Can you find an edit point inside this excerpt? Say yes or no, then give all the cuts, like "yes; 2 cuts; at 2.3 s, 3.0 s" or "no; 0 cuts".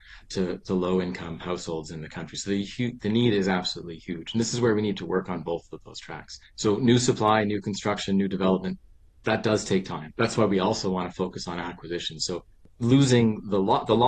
yes; 1 cut; at 10.2 s